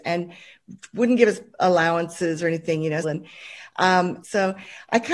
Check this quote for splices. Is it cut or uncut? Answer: cut